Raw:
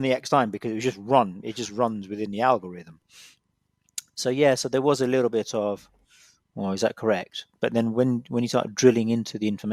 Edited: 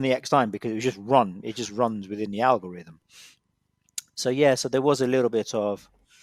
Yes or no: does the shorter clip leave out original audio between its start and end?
no